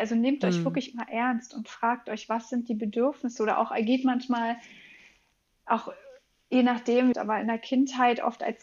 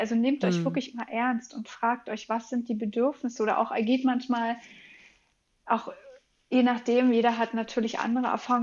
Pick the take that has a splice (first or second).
first